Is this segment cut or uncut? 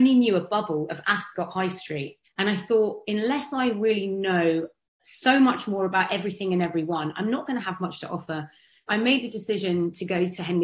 cut